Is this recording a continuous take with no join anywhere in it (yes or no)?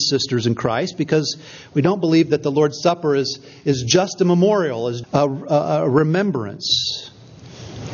no